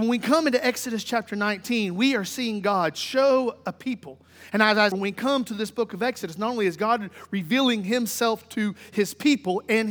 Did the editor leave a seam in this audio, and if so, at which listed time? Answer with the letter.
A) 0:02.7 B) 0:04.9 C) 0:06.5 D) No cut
B